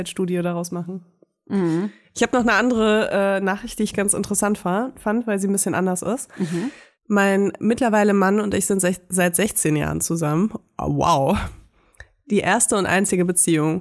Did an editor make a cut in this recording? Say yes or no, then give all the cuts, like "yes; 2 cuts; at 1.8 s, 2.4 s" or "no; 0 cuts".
no; 0 cuts